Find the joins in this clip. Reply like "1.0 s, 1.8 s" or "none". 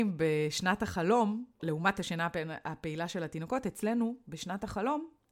1.6 s